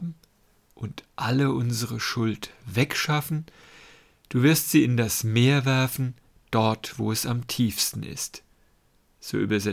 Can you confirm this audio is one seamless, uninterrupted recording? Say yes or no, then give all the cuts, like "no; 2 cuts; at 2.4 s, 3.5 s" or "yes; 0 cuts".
yes; 0 cuts